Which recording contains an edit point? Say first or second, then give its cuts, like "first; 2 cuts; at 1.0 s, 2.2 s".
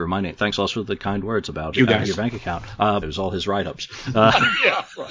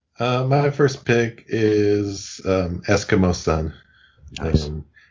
first; 2 cuts; at 1.7 s, 3.0 s